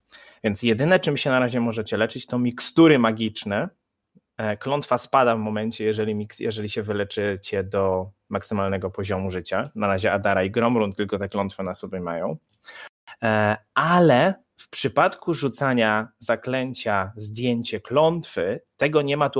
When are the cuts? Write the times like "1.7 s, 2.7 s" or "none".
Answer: none